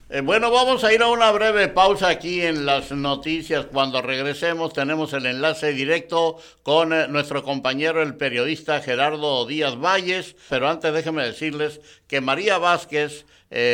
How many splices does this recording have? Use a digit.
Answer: 1